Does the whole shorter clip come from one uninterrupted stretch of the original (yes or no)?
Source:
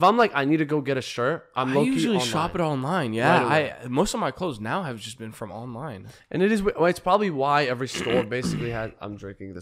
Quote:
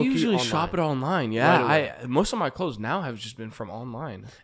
yes